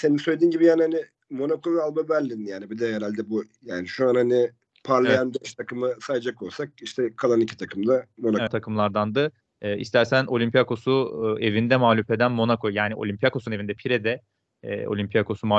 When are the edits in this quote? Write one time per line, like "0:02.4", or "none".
0:08.5